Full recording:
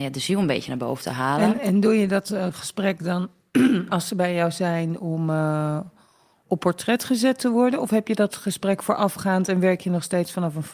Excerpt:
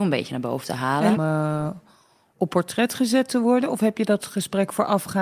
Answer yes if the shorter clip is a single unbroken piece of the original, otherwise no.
no